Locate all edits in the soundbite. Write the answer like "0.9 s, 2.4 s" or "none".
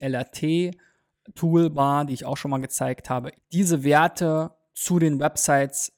3.3 s